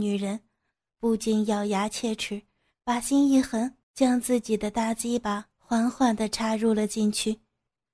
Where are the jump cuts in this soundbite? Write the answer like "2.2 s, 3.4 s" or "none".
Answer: 3.8 s